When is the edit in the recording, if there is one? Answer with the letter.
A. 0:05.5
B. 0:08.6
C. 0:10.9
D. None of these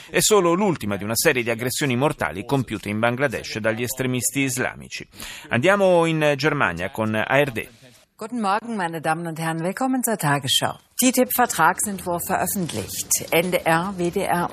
D